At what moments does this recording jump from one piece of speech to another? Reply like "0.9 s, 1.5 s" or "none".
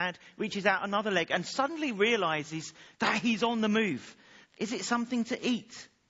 4.4 s